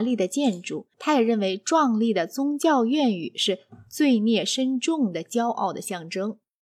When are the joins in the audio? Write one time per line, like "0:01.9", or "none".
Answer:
0:00.9